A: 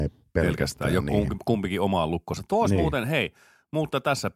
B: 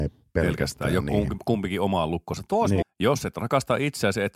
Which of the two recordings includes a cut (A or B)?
B